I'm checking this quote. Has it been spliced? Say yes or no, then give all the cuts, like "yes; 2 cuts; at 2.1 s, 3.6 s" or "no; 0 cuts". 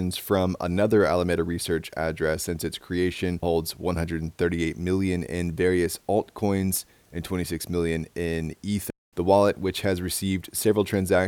yes; 2 cuts; at 3.4 s, 9.1 s